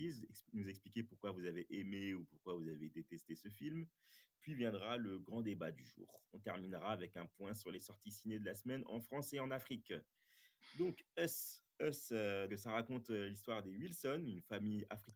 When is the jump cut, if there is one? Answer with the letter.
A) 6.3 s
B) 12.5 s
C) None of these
B